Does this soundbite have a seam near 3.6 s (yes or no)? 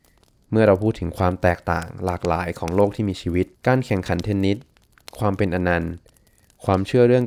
yes